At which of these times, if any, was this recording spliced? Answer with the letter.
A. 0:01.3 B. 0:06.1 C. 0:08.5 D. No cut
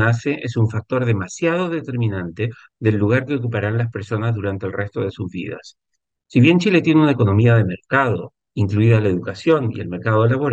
C